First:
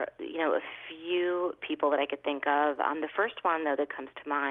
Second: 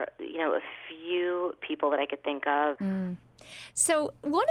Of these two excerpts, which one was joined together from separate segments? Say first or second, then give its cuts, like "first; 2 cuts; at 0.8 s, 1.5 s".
second; 1 cut; at 2.8 s